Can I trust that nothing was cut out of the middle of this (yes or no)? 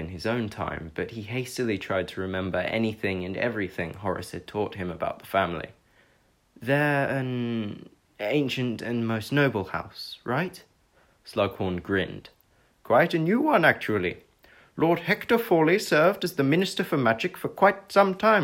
yes